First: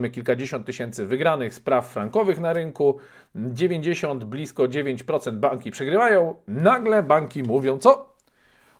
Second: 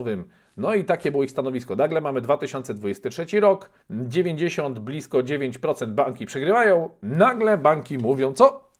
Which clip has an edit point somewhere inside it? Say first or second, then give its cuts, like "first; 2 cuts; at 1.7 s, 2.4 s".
second; 1 cut; at 3.8 s